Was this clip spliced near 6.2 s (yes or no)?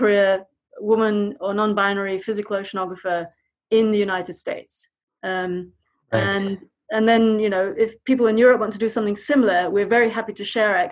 no